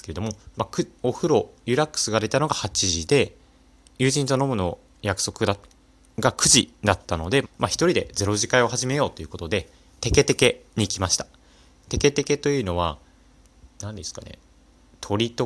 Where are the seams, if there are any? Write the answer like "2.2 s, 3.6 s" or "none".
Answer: 1.0 s, 7.4 s